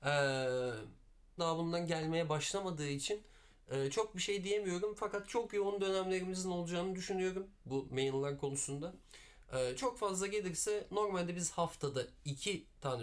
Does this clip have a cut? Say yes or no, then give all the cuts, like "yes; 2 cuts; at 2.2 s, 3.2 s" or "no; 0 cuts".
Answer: yes; 1 cut; at 1.4 s